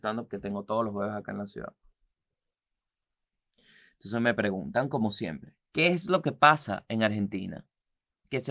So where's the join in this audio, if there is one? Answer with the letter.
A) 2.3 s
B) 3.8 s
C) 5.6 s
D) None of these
C